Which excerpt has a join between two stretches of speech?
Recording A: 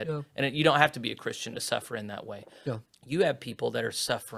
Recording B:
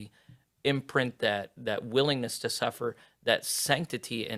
A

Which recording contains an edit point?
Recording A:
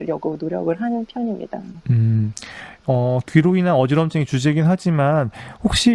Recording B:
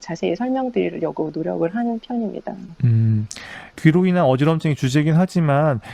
B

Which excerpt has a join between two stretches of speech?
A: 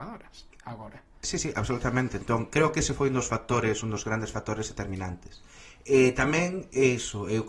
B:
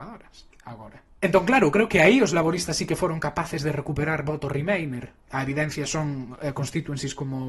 B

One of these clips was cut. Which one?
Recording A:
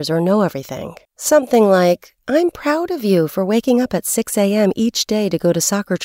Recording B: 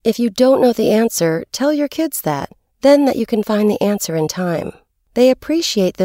A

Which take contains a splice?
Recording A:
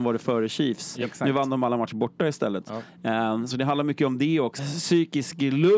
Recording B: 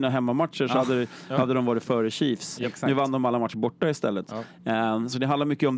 A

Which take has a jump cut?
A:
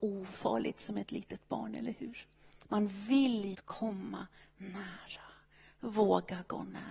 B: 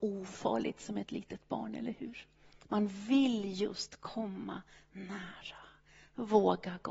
A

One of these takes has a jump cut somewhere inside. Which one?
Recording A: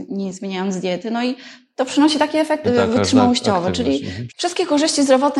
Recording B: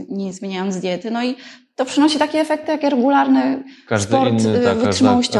A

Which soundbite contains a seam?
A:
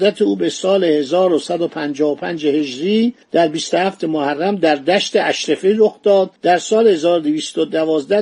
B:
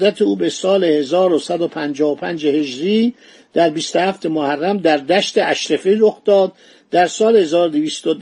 A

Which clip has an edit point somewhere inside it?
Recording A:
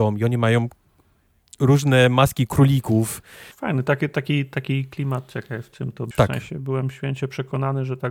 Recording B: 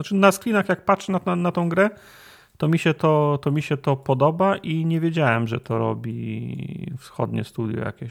A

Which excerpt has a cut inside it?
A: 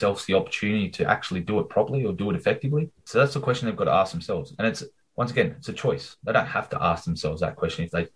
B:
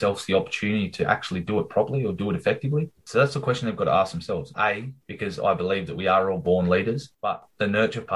B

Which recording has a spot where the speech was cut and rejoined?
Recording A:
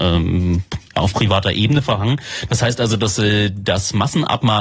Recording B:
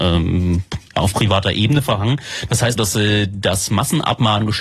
B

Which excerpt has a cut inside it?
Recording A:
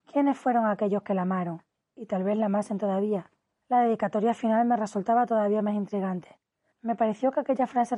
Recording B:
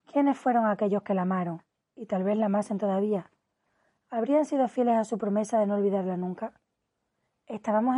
A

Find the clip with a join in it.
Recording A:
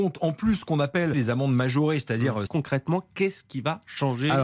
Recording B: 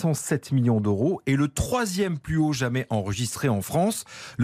A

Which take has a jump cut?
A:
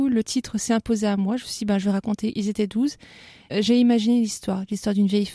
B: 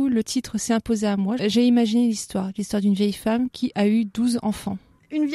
B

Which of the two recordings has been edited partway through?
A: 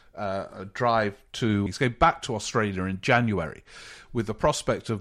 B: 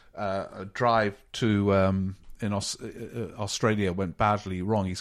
A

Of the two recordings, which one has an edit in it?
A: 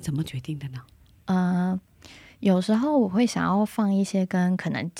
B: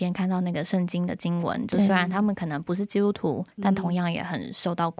B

